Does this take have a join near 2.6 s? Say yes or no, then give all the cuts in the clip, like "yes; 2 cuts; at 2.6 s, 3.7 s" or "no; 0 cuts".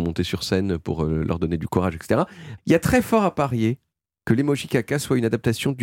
yes; 1 cut; at 2.6 s